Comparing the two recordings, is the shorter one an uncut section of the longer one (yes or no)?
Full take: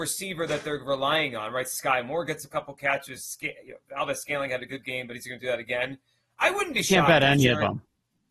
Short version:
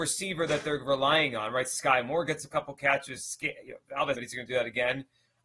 no